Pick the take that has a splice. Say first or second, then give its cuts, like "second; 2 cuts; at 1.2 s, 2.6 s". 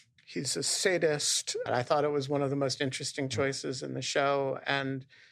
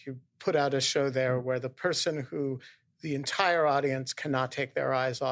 first; 1 cut; at 1.7 s